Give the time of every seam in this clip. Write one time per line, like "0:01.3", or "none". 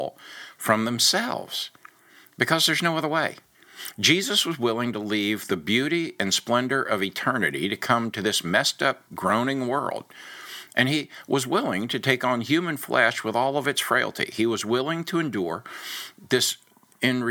0:09.1